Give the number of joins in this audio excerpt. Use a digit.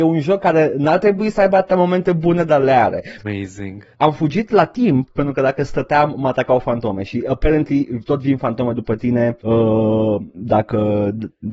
1